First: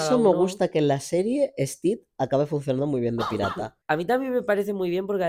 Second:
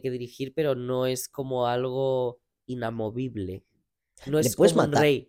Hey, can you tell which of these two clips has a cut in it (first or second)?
first